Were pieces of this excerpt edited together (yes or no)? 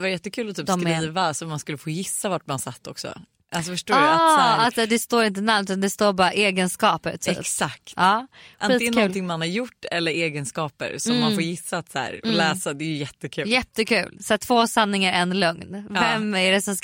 no